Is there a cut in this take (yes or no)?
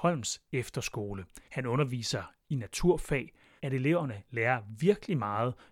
yes